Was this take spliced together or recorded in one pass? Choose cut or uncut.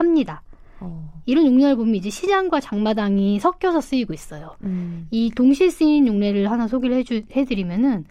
cut